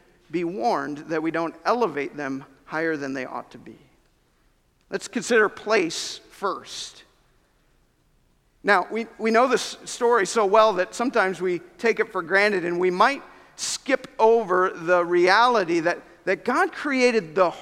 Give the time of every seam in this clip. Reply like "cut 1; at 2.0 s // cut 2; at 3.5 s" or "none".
none